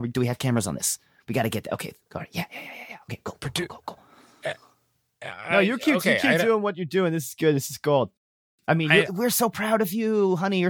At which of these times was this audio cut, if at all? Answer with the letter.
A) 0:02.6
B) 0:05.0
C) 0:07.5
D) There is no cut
D